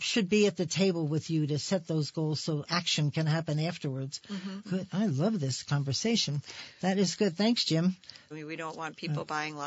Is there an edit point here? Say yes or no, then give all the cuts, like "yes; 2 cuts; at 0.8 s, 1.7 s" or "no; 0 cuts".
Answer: yes; 3 cuts; at 2.6 s, 4.6 s, 8.3 s